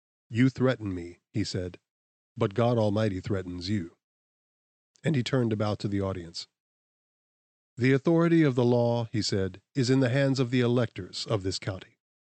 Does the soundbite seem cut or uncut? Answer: uncut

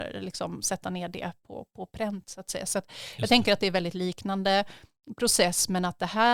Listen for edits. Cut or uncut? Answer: uncut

